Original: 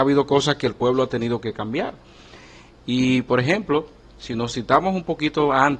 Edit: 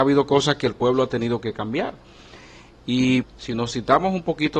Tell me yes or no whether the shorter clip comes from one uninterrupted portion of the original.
no